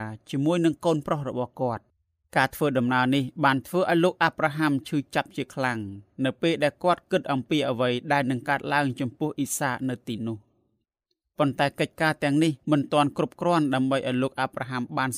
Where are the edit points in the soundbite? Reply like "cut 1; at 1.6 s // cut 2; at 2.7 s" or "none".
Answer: cut 1; at 12.6 s

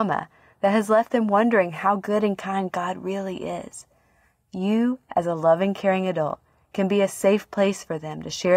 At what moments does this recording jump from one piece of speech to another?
none

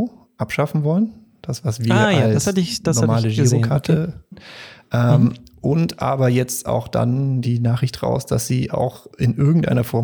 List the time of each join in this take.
cut 1; at 4.3 s // cut 2; at 7.4 s

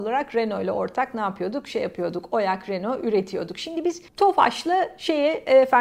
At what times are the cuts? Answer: cut 1; at 4.1 s

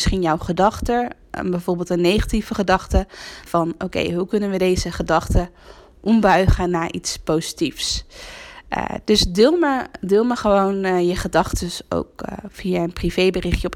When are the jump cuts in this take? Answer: cut 1; at 3.5 s

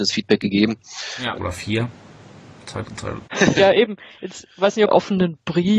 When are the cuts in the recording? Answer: cut 1; at 1.3 s // cut 2; at 3.2 s // cut 3; at 4.9 s

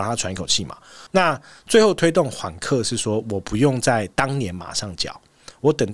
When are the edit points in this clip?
cut 1; at 1.1 s

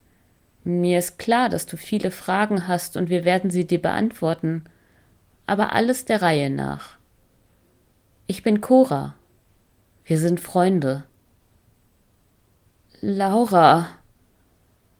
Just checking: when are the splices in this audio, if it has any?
none

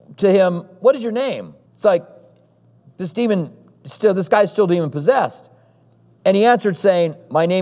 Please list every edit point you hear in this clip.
cut 1; at 1.7 s

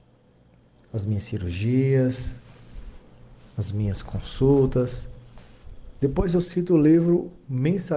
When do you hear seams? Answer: cut 1; at 5.9 s

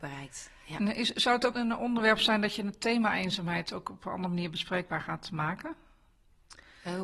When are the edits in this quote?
cut 1; at 1.5 s

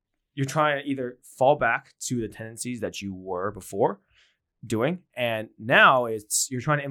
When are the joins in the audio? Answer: none

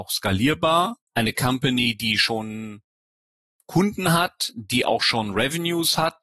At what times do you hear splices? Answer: cut 1; at 1.1 s

